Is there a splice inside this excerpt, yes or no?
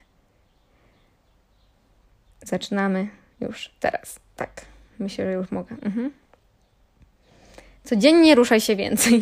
no